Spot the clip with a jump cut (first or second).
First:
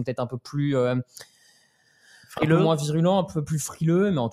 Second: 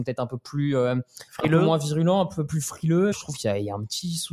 second